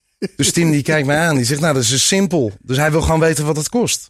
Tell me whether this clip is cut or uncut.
uncut